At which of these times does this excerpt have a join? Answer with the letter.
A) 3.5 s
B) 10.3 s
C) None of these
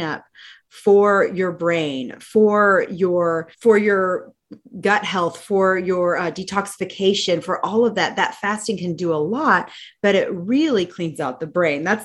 A